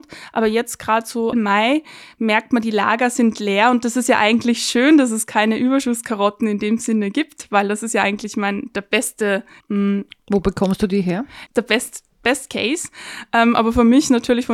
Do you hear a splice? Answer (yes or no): yes